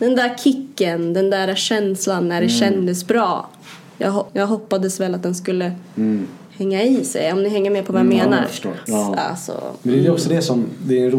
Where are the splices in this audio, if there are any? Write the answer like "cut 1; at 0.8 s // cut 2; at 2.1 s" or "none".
cut 1; at 4.3 s // cut 2; at 8.9 s